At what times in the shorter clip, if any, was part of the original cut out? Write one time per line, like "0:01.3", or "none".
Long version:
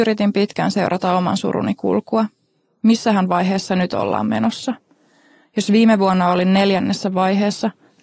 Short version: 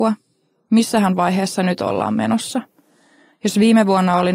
none

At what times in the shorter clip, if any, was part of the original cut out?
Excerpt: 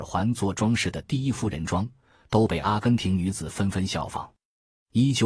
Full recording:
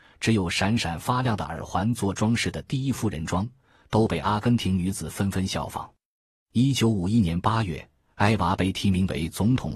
none

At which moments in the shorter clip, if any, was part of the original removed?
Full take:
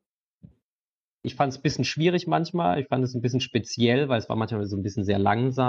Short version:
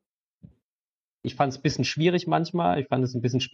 none

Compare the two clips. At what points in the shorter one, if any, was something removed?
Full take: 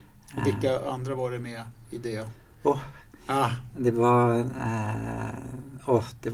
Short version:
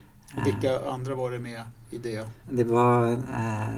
0:02.4

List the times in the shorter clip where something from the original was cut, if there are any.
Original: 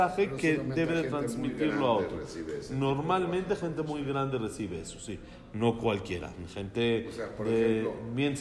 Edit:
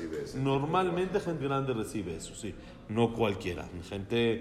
0:01.4

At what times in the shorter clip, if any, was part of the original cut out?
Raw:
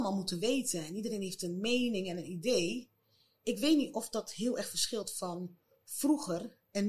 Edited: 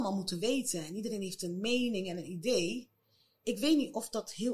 none

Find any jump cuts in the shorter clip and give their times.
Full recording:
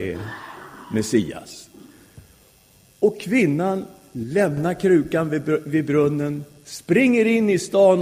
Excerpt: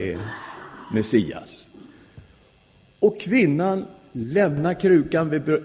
none

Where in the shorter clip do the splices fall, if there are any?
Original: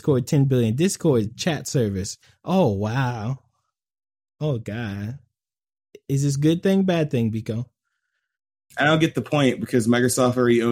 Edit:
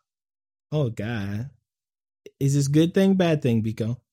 none

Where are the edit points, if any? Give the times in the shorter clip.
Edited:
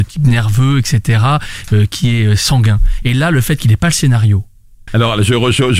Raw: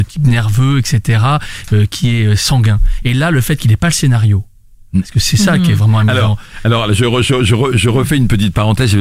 0:04.9

